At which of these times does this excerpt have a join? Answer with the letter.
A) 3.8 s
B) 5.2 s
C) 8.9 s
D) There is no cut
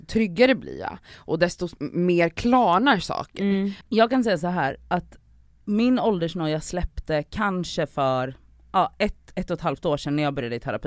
A